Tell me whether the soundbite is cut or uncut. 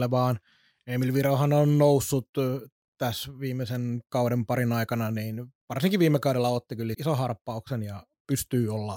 cut